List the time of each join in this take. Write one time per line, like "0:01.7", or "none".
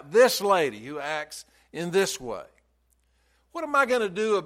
none

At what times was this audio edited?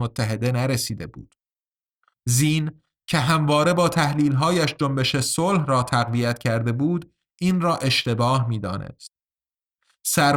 0:02.1

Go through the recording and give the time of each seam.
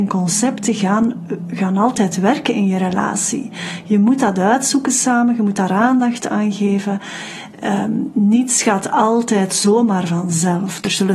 none

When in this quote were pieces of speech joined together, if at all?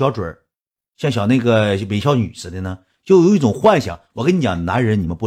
none

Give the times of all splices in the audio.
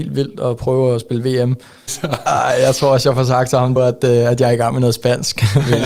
0:01.9
0:03.8

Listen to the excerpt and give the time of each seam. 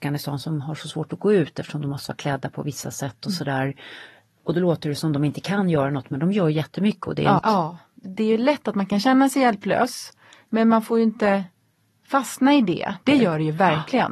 0:07.4
0:13.0

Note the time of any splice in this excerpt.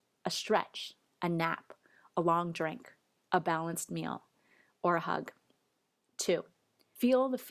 none

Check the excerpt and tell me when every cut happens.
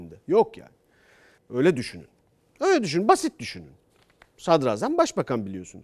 0:01.4

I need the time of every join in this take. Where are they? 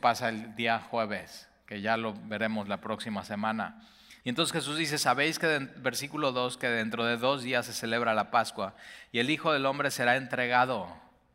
0:04.2

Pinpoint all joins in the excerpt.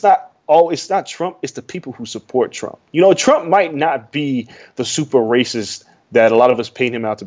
none

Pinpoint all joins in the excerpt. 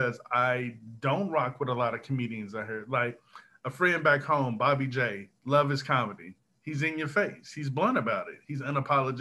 none

